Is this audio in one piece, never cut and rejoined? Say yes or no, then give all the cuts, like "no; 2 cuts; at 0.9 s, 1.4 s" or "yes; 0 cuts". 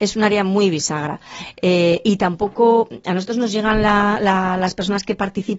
yes; 0 cuts